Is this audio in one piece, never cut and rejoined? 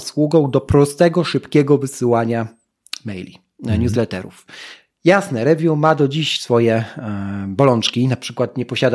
yes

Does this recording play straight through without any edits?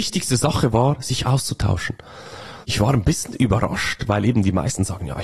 no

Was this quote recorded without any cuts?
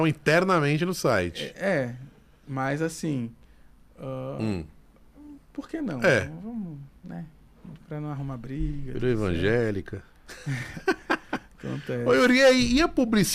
yes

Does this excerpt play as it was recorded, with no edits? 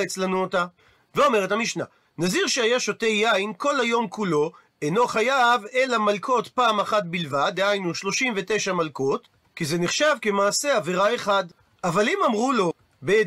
yes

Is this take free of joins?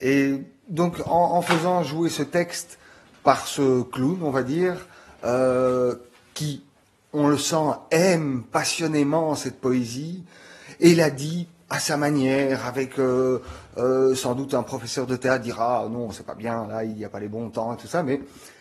yes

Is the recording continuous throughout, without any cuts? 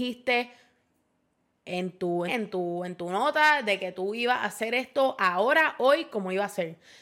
no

